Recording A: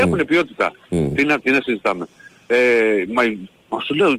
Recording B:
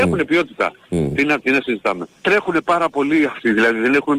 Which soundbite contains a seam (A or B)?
B